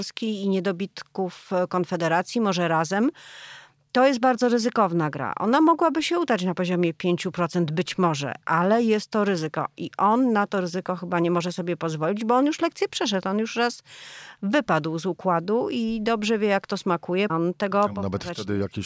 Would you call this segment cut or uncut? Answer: cut